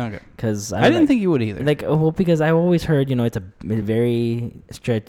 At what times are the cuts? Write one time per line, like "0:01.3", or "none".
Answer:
none